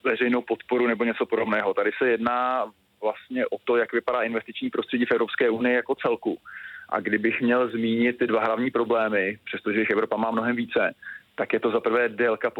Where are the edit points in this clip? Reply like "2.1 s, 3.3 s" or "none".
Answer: none